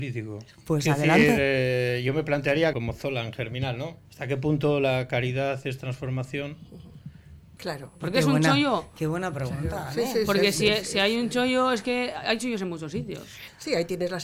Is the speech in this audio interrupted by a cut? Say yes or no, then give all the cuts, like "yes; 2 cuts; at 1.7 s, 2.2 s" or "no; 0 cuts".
yes; 3 cuts; at 2.7 s, 4.1 s, 7.6 s